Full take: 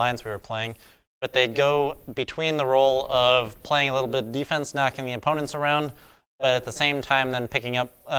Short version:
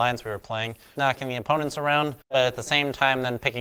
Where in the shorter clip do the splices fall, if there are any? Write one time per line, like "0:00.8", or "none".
0:01.0
0:02.2